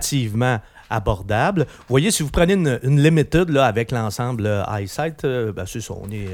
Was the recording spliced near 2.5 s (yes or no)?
no